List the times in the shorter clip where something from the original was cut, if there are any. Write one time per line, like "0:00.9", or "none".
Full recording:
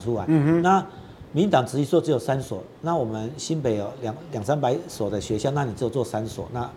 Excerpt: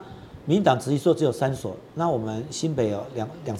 none